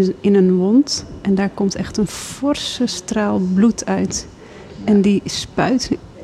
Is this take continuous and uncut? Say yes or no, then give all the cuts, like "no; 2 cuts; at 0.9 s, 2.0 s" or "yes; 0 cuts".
yes; 0 cuts